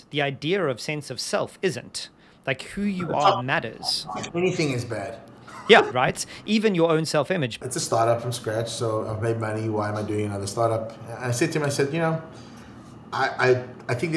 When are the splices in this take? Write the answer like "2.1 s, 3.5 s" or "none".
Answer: 5.9 s, 7.6 s

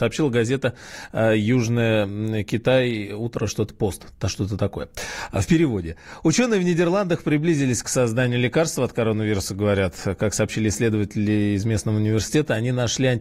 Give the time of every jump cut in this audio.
none

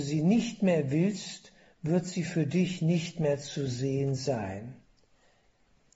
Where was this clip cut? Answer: none

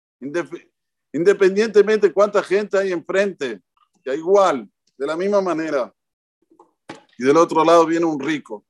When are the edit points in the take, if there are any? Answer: 4.1 s, 7.1 s

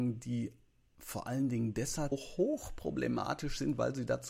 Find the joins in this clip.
2.1 s

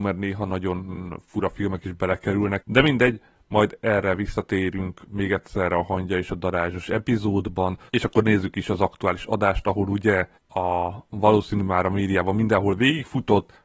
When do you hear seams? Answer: 2.6 s, 7.9 s, 10.4 s

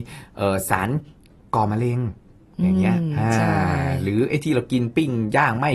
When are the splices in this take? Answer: none

